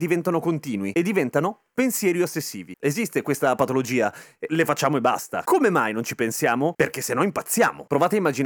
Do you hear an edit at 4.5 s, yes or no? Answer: yes